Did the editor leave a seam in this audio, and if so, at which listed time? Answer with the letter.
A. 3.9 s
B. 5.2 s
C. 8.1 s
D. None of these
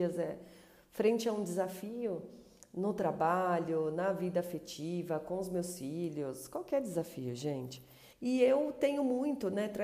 C